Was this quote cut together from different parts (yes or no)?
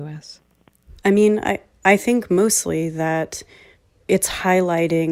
no